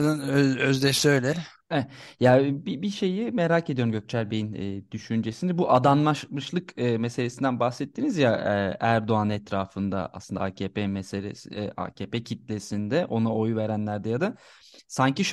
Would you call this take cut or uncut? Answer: uncut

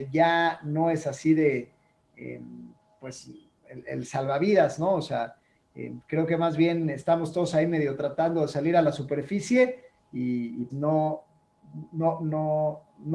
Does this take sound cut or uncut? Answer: cut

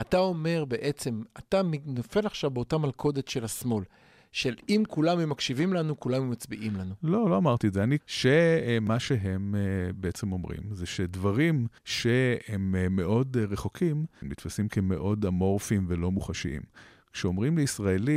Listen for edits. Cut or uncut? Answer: cut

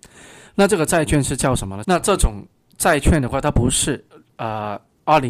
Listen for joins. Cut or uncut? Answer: cut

